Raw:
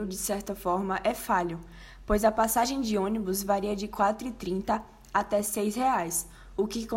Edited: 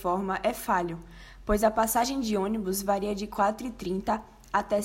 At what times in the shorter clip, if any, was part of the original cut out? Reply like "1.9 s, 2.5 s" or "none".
none